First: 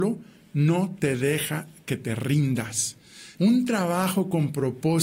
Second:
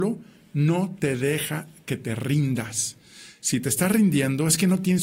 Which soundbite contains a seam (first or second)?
first